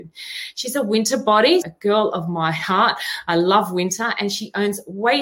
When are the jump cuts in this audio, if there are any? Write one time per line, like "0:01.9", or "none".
0:01.6